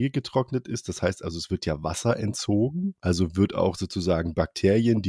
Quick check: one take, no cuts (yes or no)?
no